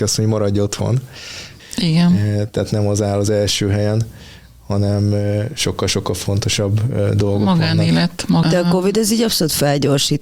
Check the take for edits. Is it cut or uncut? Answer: cut